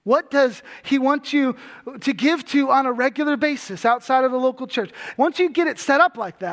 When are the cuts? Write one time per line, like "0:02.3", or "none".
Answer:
0:05.1